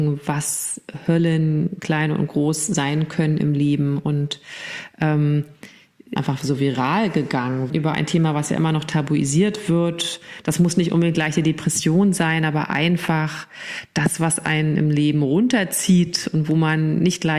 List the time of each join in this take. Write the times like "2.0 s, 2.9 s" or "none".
6.2 s, 7.7 s